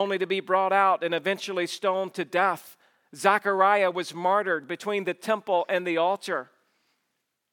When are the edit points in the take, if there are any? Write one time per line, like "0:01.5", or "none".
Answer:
none